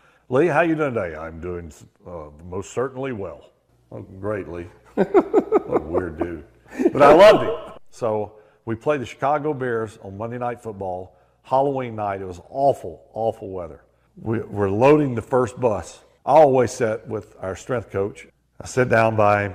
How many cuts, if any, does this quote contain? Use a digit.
0